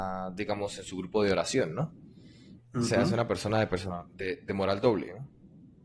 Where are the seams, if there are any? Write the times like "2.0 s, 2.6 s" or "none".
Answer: none